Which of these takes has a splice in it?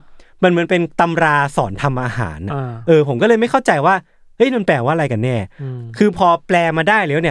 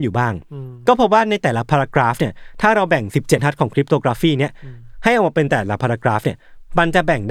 second; 1 cut; at 3.4 s

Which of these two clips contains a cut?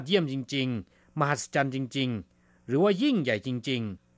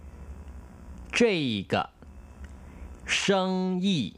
second; 1 cut; at 3.0 s

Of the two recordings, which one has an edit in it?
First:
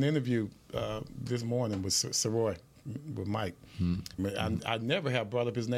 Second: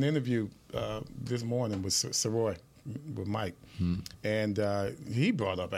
first; 1 cut; at 4.2 s

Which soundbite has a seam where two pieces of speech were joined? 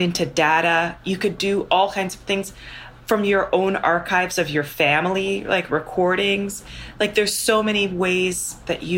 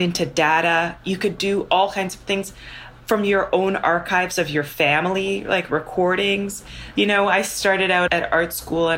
second; 2 cuts; at 6.9 s, 8.1 s

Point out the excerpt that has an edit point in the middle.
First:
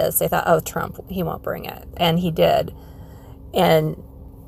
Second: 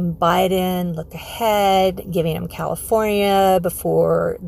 first; 1 cut; at 1.9 s

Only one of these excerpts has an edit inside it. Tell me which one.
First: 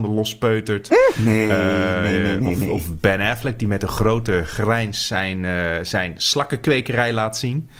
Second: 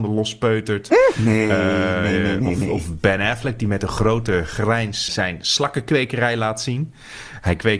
second; 1 cut; at 5.1 s

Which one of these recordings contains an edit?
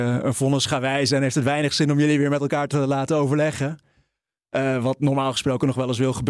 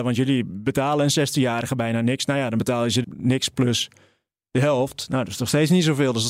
second; 1 cut; at 3.0 s

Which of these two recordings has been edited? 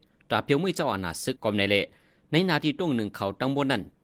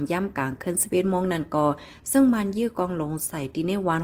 first; 1 cut; at 1.4 s

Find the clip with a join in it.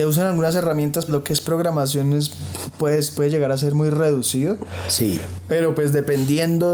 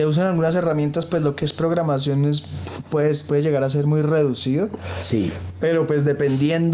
first; 1 cut; at 1.1 s

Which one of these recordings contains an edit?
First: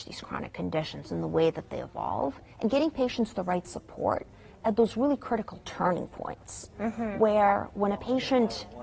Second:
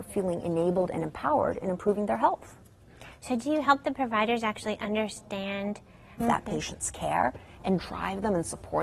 second; 1 cut; at 6.2 s

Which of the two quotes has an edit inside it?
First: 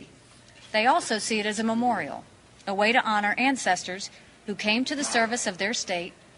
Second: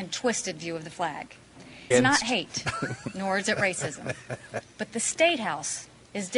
second; 2 cuts; at 1.9 s, 4.6 s

